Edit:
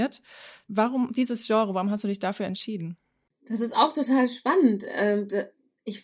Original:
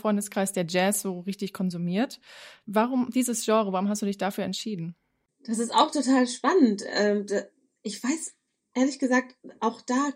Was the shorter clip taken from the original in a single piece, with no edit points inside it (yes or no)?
yes